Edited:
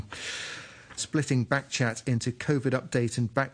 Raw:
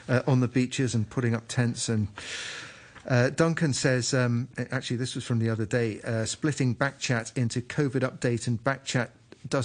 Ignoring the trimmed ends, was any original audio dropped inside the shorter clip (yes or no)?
yes